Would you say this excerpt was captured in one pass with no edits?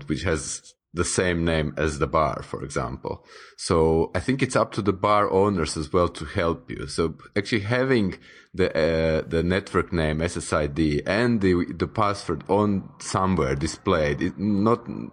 yes; 0 cuts

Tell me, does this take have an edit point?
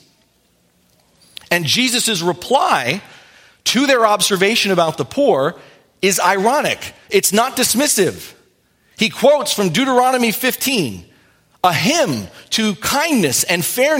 no; 0 cuts

